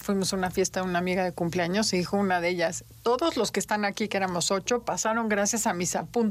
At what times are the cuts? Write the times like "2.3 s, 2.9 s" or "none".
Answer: none